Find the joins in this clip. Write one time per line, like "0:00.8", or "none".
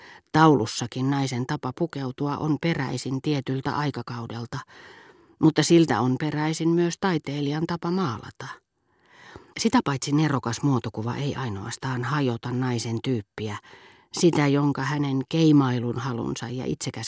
0:09.5